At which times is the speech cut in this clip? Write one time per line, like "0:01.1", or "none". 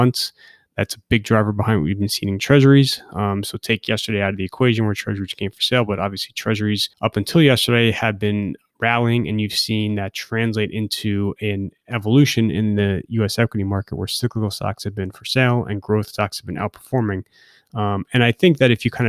0:06.9